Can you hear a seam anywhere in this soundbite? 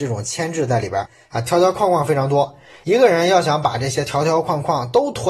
no; 0 cuts

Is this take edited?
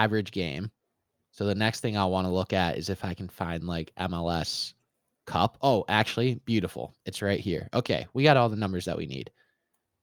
no; 0 cuts

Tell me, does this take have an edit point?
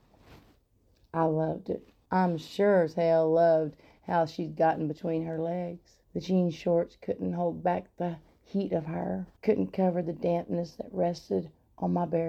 yes; 3 cuts; at 2.1 s, 6.0 s, 9.4 s

